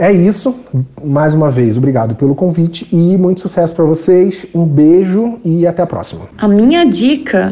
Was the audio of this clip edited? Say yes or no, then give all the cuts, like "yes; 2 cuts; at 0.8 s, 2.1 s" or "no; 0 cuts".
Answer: no; 0 cuts